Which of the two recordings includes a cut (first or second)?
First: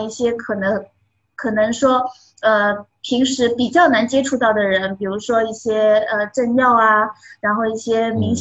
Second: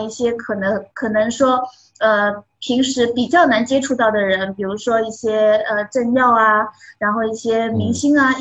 second